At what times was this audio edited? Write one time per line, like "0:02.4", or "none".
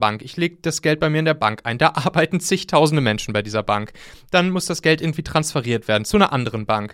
none